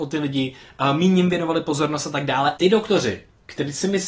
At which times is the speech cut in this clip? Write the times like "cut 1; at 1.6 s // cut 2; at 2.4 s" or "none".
cut 1; at 2.6 s